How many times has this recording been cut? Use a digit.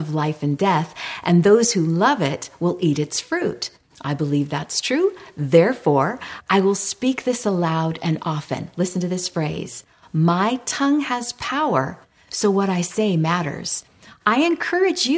0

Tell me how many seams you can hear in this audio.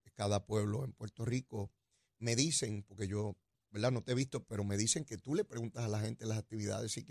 0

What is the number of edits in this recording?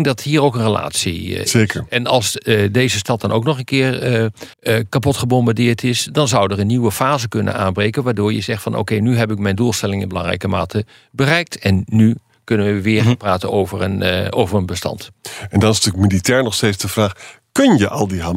1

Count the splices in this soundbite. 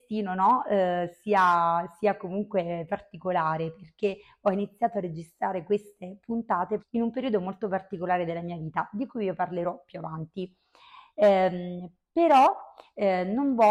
1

